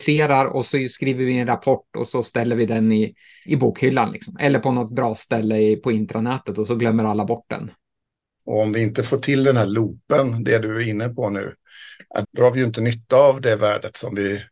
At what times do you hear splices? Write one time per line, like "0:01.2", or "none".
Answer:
0:03.5
0:08.4
0:12.2